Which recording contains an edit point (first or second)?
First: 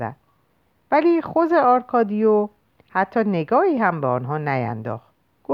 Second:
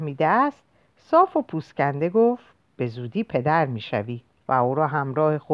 second